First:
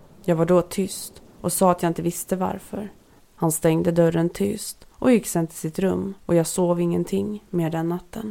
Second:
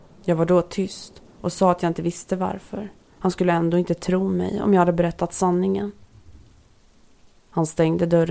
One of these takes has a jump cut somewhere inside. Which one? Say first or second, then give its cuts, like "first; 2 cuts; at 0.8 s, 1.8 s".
first; 2 cuts; at 3.2 s, 6.2 s